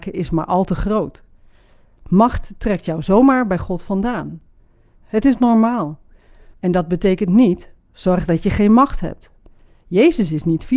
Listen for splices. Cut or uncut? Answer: cut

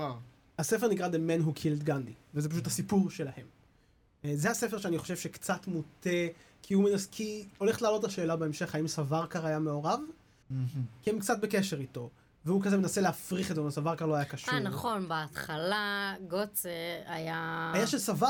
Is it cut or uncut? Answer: cut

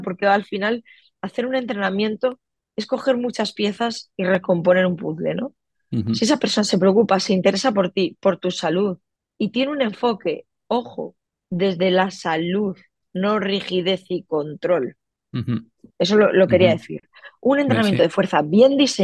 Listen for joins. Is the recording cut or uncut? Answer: cut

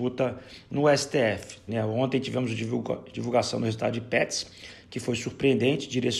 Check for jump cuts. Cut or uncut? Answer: cut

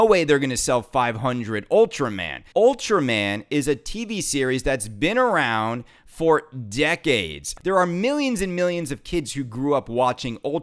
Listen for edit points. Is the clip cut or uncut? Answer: cut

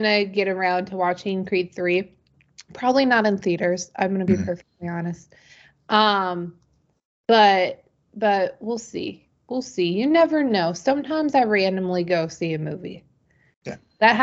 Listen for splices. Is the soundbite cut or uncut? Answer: uncut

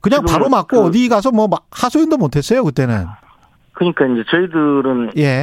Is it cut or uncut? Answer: uncut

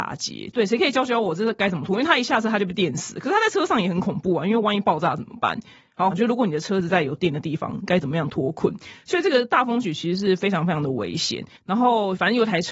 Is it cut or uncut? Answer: cut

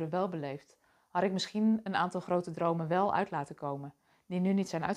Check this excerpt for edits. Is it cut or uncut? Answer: uncut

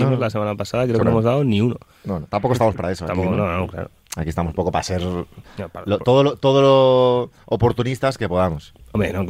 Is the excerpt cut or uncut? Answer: uncut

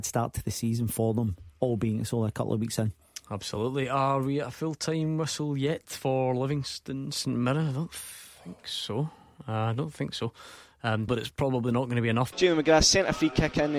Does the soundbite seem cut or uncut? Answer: cut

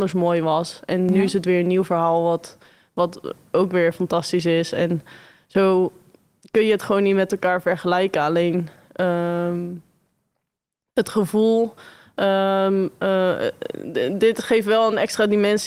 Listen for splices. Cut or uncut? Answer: uncut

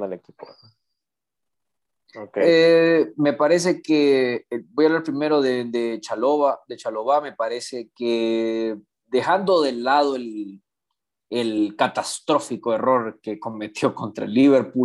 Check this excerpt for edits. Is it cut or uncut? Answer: cut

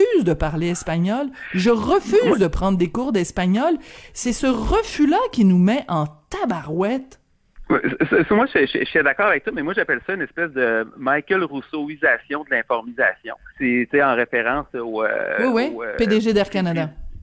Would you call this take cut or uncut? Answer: cut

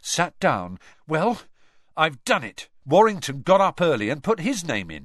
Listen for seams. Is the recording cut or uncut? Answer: cut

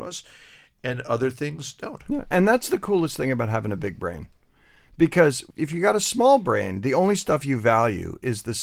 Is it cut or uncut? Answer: uncut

